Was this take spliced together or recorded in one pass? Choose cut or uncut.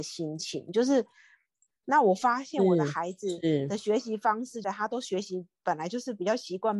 cut